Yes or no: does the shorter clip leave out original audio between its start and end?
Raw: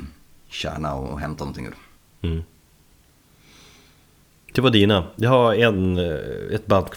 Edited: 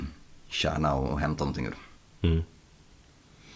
no